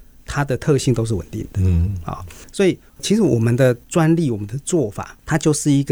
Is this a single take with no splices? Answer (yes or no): yes